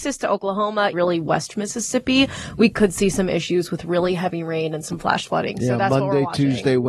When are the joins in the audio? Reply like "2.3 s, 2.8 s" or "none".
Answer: 0.9 s